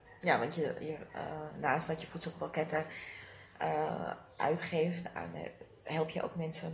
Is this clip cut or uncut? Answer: uncut